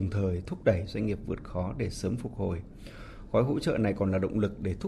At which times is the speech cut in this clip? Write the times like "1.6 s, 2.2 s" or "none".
none